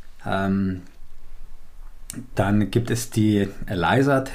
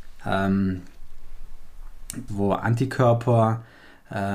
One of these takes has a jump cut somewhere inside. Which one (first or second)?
second